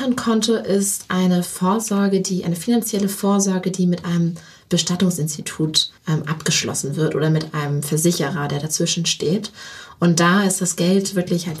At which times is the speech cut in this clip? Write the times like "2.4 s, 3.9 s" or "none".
6.0 s